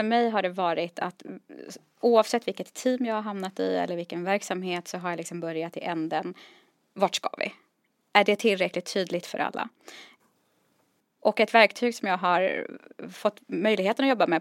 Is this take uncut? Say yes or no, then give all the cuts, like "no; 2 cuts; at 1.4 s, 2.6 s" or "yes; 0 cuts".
yes; 0 cuts